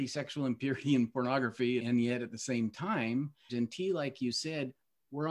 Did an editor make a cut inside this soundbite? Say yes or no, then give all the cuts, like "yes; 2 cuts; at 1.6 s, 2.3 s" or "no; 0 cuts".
yes; 2 cuts; at 1.8 s, 3.5 s